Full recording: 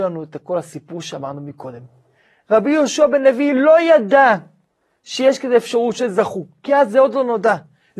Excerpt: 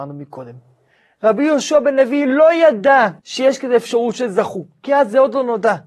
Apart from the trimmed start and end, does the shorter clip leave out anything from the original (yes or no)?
yes